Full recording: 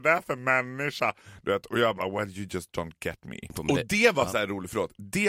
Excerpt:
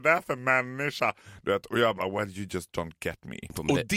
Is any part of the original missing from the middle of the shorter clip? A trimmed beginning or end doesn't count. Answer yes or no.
no